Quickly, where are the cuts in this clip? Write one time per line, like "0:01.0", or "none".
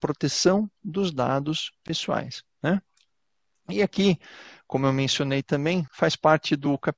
none